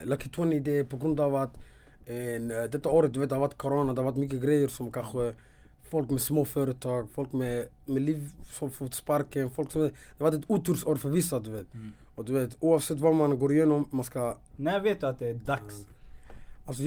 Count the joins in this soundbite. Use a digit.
1